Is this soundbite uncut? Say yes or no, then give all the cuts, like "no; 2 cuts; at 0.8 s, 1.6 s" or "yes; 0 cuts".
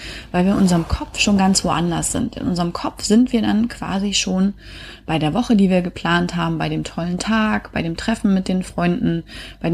yes; 0 cuts